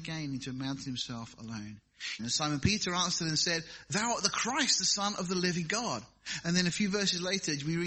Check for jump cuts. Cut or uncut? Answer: cut